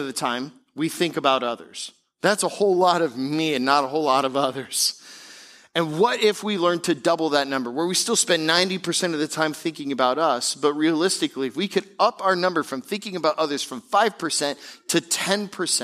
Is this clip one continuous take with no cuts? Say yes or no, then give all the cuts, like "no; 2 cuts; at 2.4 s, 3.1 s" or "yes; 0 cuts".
yes; 0 cuts